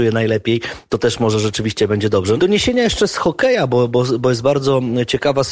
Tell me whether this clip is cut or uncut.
cut